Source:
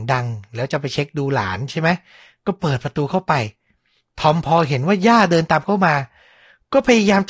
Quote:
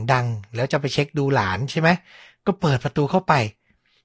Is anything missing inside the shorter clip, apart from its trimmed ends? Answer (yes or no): no